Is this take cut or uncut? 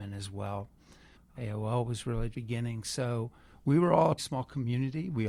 cut